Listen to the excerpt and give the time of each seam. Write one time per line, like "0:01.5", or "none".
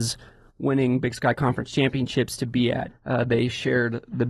0:02.9